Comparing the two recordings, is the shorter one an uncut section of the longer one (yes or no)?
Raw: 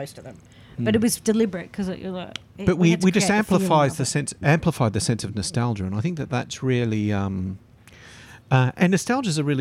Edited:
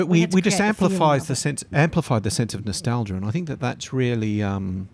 yes